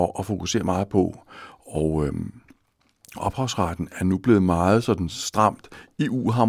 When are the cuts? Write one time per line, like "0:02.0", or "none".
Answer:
none